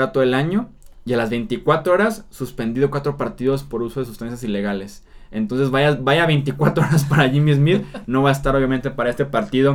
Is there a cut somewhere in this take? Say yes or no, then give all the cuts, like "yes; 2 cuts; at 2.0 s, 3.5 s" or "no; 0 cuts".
no; 0 cuts